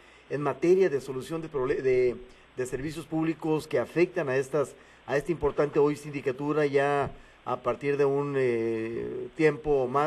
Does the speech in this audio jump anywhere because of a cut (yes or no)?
no